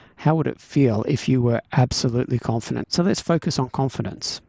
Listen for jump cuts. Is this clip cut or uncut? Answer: cut